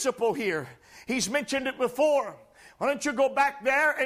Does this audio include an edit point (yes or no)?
no